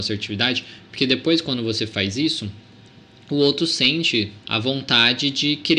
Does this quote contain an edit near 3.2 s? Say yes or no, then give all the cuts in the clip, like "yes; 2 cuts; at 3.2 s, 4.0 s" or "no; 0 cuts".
no; 1 cut; at 4.4 s